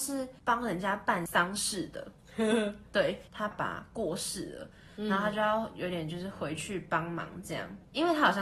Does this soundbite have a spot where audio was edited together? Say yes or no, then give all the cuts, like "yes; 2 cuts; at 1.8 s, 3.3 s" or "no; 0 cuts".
yes; 1 cut; at 3.5 s